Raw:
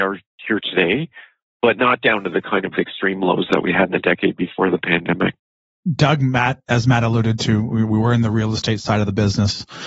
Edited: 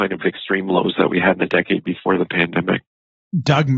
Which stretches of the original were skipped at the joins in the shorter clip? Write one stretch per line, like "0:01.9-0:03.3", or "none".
none